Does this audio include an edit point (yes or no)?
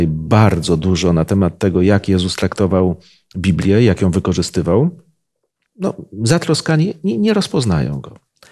yes